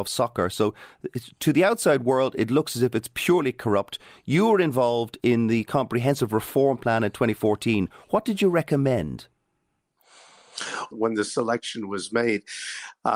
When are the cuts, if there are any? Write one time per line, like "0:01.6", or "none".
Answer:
0:10.9

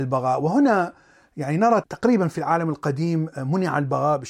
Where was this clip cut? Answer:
0:01.8

